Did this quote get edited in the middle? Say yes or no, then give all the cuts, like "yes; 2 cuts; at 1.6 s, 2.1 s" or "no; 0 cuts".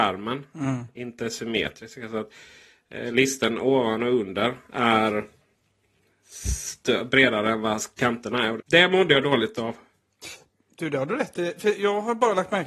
yes; 1 cut; at 8.6 s